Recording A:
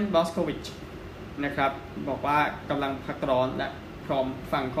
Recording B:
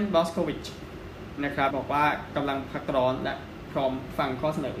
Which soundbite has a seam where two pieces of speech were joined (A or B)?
B